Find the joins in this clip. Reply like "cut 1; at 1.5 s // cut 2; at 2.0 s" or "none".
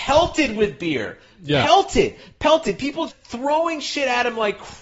cut 1; at 3.1 s

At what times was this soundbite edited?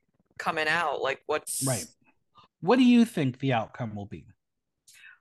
cut 1; at 2.5 s

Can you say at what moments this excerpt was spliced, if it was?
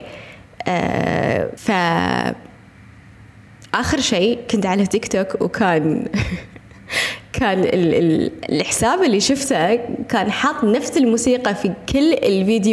cut 1; at 1.6 s

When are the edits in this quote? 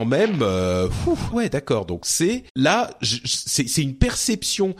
cut 1; at 1.3 s // cut 2; at 2.5 s

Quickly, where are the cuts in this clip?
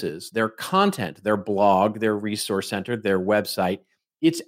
none

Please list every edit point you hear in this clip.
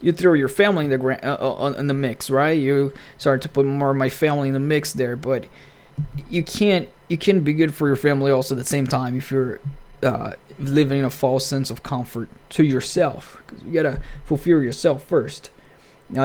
none

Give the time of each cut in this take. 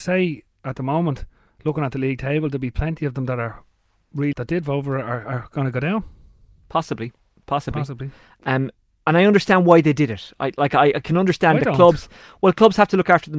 cut 1; at 4.3 s

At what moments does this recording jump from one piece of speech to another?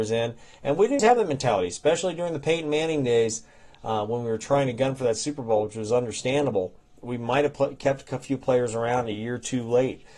cut 1; at 1.0 s

